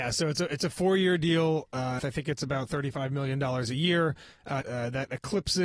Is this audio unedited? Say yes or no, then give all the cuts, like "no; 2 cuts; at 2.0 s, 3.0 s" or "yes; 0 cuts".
no; 2 cuts; at 2.0 s, 4.6 s